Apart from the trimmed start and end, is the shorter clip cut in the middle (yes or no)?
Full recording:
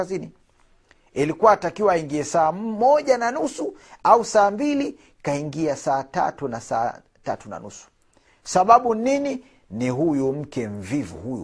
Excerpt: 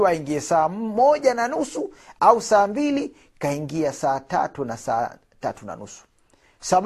no